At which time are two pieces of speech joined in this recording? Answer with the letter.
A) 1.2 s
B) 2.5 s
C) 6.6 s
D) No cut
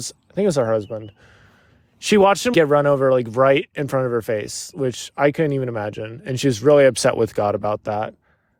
B